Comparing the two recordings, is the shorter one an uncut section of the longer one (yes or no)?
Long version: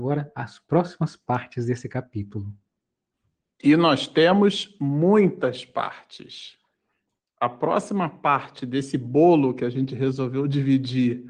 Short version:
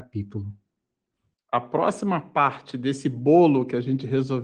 no